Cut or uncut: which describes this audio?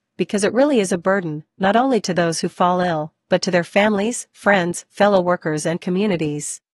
uncut